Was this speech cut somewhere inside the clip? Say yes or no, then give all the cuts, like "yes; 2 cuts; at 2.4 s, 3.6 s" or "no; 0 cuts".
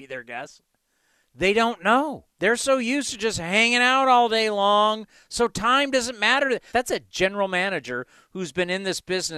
yes; 2 cuts; at 2.3 s, 6.7 s